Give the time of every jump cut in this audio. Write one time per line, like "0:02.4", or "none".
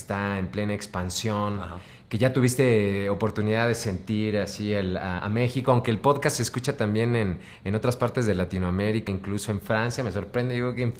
0:05.2
0:09.1

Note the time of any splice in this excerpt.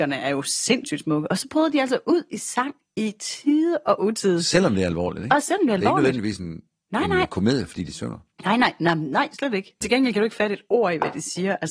0:09.8

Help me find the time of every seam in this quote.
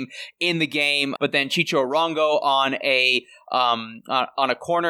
0:01.2

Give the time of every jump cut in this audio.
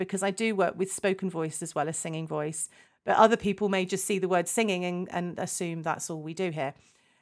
0:02.9

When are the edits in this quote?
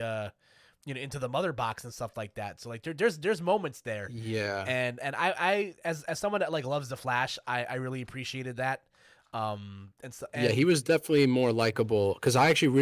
none

